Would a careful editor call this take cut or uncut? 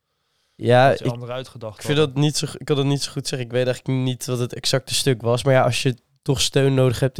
uncut